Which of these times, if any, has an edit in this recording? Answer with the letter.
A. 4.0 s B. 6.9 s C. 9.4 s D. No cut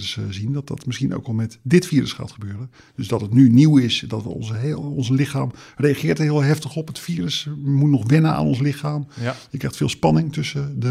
D